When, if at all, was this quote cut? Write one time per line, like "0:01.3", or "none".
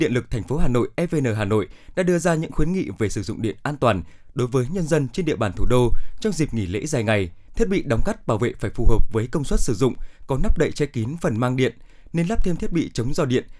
0:07.5